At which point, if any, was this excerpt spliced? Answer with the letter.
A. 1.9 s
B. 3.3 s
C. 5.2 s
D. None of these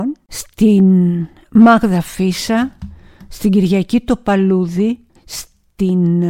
C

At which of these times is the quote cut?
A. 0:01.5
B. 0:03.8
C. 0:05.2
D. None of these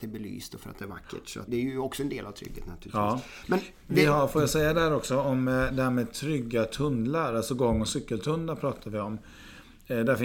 A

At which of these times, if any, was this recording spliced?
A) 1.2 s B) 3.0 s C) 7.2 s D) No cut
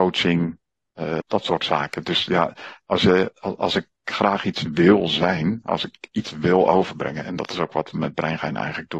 A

